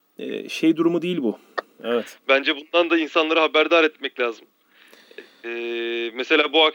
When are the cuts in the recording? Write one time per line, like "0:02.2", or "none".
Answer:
0:01.8